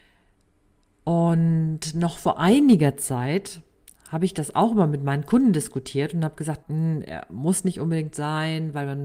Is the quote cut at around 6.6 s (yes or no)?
yes